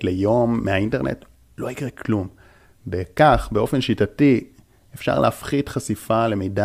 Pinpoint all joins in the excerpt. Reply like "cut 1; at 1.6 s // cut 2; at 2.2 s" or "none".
none